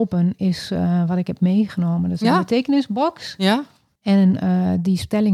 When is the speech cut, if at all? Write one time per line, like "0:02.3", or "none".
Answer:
0:04.0